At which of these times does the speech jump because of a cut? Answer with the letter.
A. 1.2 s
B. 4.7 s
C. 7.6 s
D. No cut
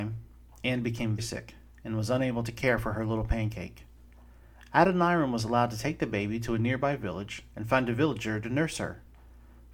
A